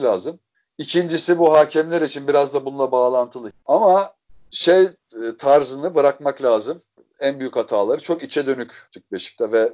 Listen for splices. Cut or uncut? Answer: cut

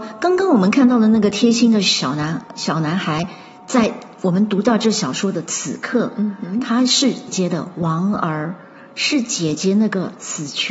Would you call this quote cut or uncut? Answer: cut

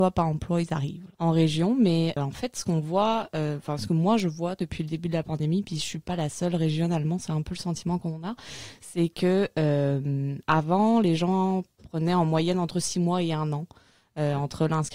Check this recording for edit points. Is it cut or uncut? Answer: cut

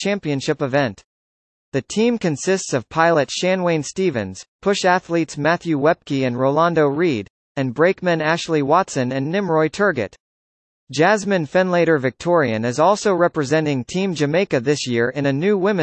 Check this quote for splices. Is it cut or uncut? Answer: uncut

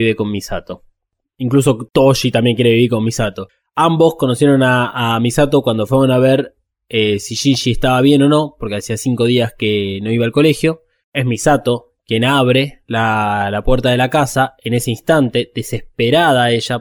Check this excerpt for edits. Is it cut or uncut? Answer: uncut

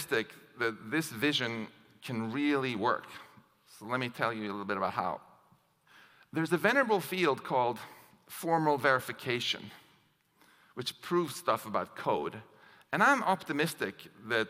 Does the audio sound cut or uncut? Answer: uncut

